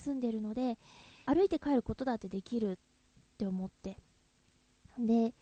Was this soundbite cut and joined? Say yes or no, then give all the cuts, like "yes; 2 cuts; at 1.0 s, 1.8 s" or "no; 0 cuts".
yes; 1 cut; at 1.3 s